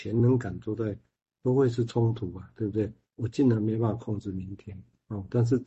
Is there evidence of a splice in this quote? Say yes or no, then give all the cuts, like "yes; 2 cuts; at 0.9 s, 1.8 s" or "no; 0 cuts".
no; 0 cuts